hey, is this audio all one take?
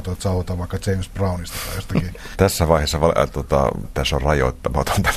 no; 2 cuts; at 2.3 s, 3.8 s

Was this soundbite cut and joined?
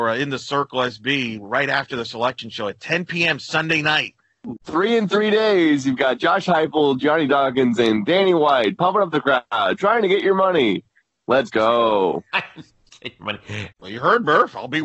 yes; 2 cuts; at 4.6 s, 13.7 s

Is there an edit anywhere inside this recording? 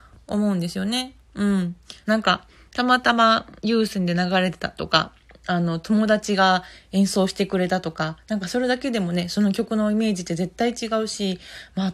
yes; 2 cuts; at 2.0 s, 3.6 s

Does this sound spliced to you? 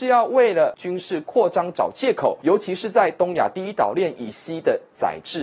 no; 0 cuts

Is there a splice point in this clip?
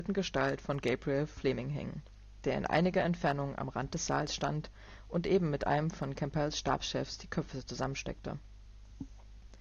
no; 0 cuts

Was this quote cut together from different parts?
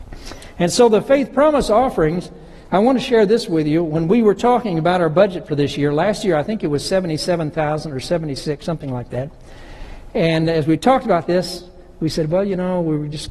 no; 0 cuts

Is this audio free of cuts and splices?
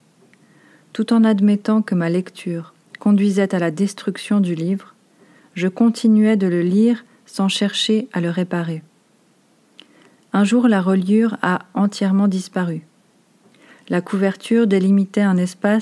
yes; 0 cuts

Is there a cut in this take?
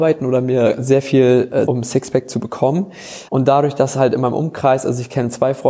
yes; 2 cuts; at 1.7 s, 3.3 s

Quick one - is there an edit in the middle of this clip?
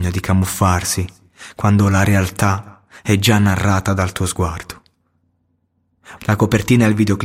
yes; 1 cut; at 6.2 s

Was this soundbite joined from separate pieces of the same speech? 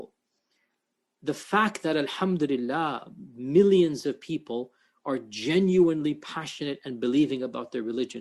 no; 0 cuts

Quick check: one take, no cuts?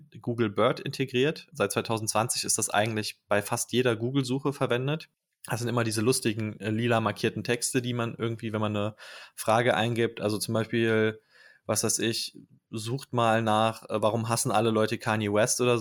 yes; 0 cuts

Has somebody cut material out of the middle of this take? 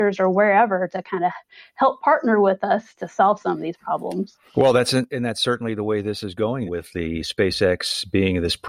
yes; 2 cuts; at 4.5 s, 6.7 s

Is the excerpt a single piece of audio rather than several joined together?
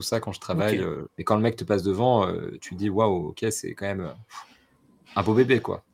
no; 1 cut; at 1.1 s

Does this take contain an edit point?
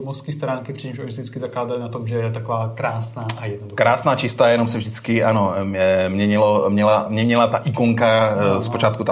no; 0 cuts

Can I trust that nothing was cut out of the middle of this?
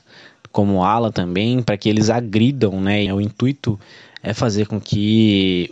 no; 1 cut; at 3.1 s

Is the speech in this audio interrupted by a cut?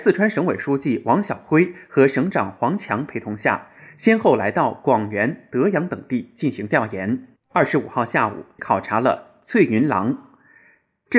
yes; 2 cuts; at 7.4 s, 8.6 s

